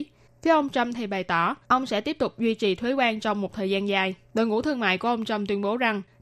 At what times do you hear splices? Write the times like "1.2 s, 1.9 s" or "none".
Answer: 1.6 s, 4.3 s